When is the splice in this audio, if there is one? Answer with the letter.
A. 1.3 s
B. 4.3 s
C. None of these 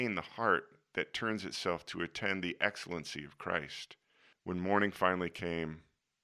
B